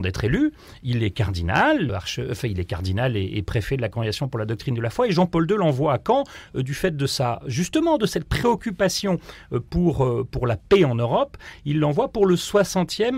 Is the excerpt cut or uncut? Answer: cut